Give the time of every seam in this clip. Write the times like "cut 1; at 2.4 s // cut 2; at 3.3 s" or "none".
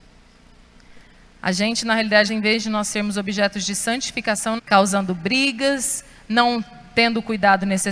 cut 1; at 2.3 s // cut 2; at 4.6 s